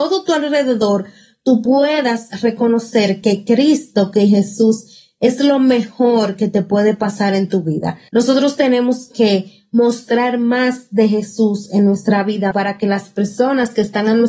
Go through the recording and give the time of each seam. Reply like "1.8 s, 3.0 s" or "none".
8.1 s, 12.5 s